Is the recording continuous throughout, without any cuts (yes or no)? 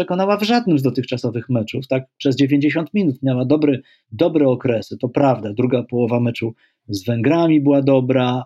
yes